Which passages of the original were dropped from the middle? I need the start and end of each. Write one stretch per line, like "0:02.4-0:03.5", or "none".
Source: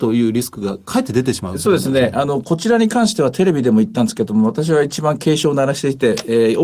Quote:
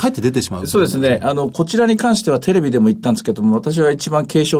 none

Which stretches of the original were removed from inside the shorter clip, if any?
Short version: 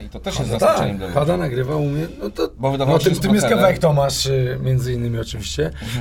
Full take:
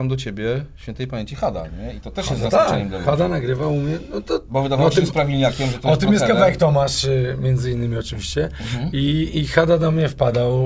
0:05.1-0:06.0

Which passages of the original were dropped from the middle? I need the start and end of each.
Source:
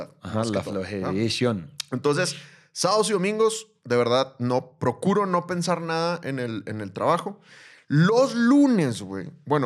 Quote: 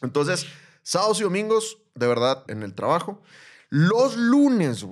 0:04.4-0:06.6

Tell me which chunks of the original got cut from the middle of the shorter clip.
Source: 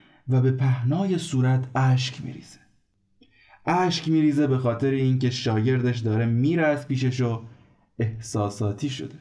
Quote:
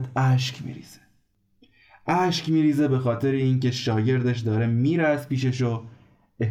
none

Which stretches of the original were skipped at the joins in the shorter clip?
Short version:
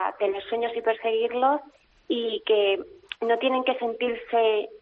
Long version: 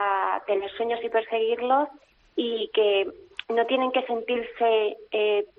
none

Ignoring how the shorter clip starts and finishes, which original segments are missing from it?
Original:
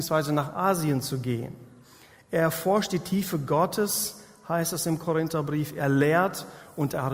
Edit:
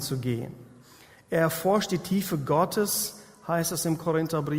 none

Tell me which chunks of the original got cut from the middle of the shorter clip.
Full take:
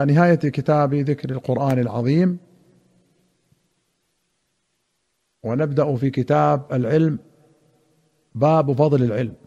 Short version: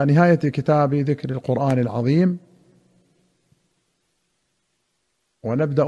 none

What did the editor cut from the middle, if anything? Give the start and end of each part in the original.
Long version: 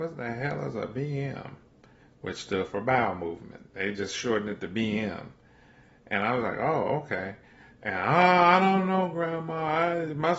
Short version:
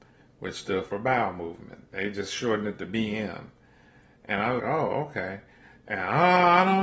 0:06.4-0:06.5

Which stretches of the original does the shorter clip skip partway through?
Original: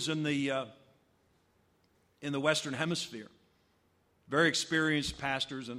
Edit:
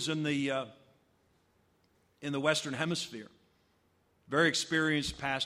none

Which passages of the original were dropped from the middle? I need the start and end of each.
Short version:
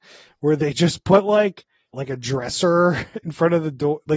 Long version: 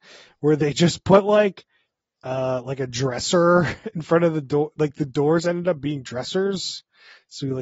0:01.9-0:02.6

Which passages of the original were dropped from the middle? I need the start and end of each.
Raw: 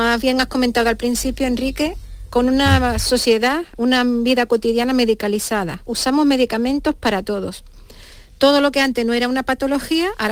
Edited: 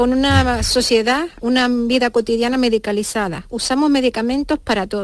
none

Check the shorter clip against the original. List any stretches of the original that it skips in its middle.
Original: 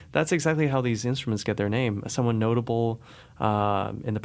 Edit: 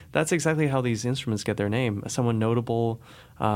none

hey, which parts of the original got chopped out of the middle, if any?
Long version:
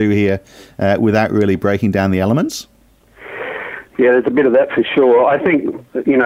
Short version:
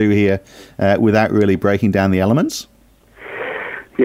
none

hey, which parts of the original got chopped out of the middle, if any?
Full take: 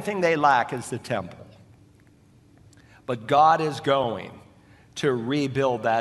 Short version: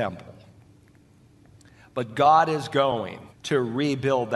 0:04.4-0:04.8

